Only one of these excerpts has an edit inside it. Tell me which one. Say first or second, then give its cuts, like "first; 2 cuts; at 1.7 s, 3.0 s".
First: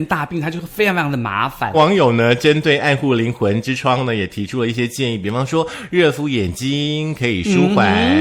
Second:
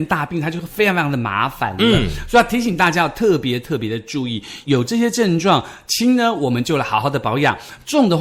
first; 1 cut; at 1.7 s